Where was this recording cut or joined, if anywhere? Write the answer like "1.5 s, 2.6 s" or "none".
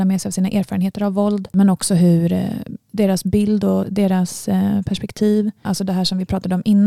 5.7 s